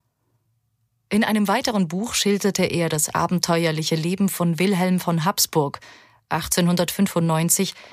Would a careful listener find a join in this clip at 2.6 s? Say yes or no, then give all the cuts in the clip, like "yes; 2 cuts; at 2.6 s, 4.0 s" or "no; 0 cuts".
no; 0 cuts